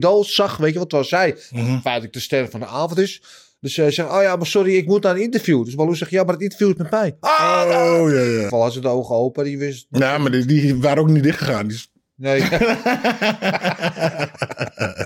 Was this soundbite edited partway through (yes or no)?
yes